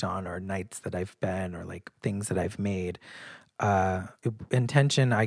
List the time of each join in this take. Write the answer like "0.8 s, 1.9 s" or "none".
4.2 s

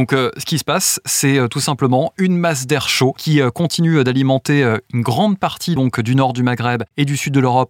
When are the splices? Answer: none

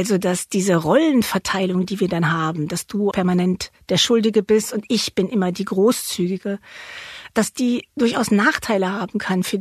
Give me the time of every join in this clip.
3.1 s

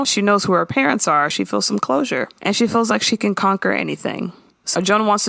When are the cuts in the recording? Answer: none

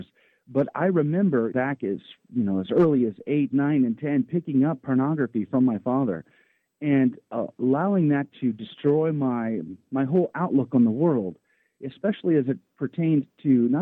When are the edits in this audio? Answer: 1.5 s

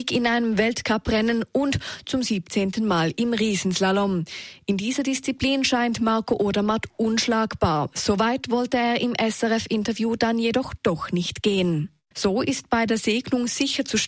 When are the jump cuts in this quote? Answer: 12.1 s

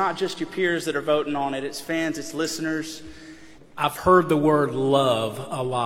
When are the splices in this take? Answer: 3.6 s

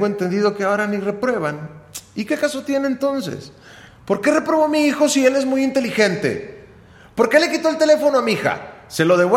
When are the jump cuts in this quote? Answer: 3.9 s

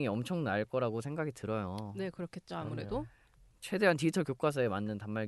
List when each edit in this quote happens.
none

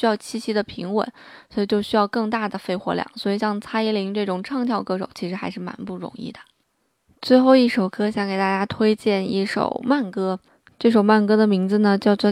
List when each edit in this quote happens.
none

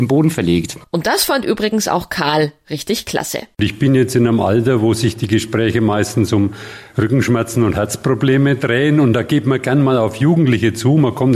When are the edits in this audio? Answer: none

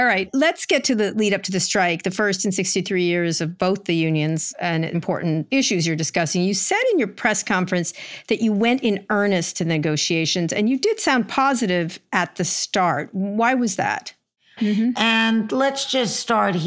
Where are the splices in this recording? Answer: 4.9 s, 14.6 s

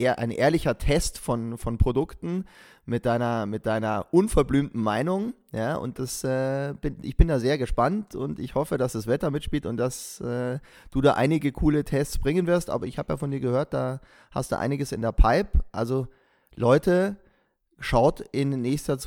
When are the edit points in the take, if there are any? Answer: none

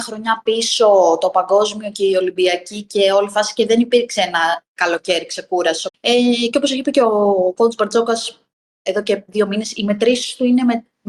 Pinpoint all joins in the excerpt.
5.9 s

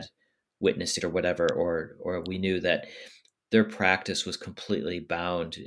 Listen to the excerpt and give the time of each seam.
1.0 s

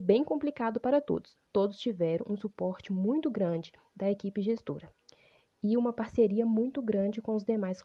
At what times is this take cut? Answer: 1.4 s

